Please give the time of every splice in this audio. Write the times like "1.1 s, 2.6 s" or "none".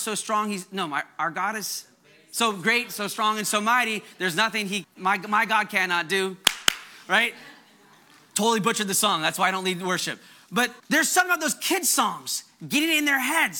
4.8 s, 10.8 s